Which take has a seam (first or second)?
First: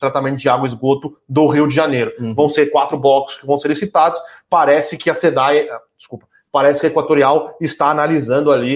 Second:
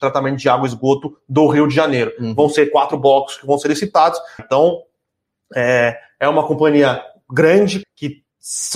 second